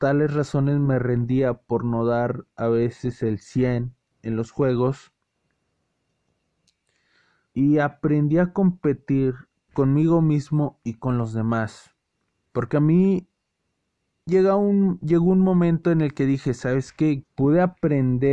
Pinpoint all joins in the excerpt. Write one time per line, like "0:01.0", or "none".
0:07.5
0:17.2